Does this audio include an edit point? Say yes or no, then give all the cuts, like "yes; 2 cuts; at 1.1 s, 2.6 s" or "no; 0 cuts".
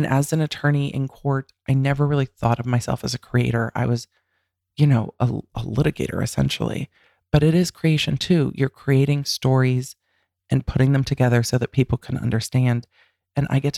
no; 0 cuts